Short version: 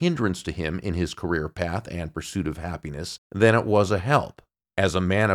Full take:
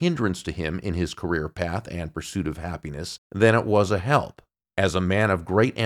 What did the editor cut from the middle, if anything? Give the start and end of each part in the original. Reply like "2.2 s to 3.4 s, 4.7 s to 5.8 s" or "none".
none